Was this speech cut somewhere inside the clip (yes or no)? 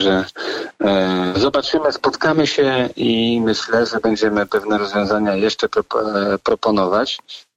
no